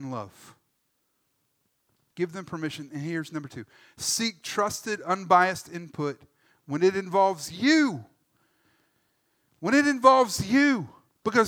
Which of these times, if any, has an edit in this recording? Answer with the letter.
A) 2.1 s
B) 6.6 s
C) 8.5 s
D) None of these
A